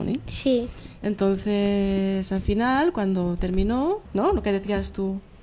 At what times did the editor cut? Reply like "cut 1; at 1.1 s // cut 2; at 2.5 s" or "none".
cut 1; at 4.1 s